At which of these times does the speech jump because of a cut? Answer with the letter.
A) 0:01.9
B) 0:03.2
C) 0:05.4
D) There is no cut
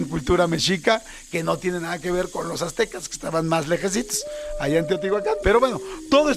C